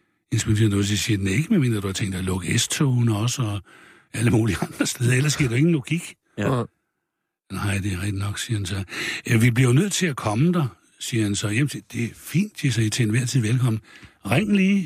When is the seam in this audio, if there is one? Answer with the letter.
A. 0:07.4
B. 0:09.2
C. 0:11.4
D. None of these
D